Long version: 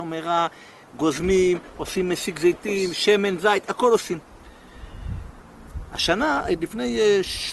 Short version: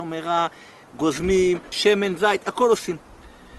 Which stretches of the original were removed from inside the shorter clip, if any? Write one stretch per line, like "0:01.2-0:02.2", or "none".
0:01.7-0:02.9